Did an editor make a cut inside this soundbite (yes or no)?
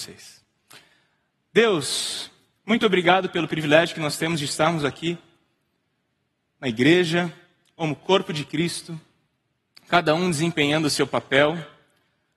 no